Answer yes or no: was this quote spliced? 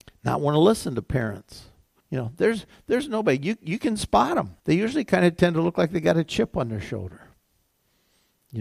yes